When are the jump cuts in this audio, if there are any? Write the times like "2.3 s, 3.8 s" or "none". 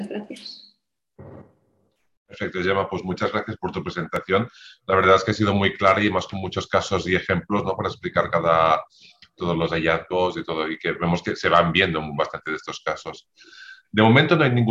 none